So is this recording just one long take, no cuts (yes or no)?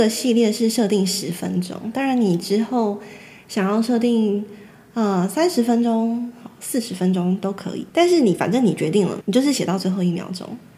no